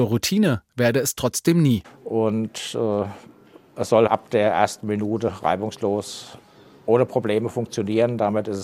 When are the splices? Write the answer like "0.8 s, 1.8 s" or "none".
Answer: 1.8 s, 4.1 s